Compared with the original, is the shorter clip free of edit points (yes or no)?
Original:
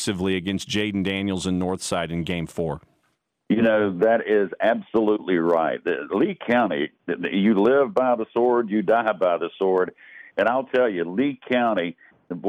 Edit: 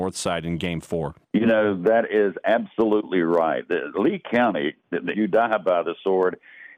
no